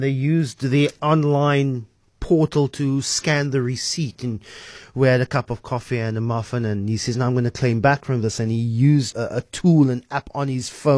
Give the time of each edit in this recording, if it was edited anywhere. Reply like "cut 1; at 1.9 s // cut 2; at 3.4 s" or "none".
cut 1; at 9.1 s